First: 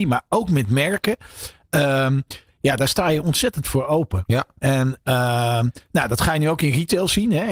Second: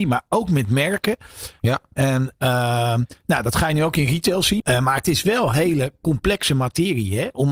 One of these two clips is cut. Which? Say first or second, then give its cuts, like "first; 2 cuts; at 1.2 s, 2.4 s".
second; 2 cuts; at 1.6 s, 4.6 s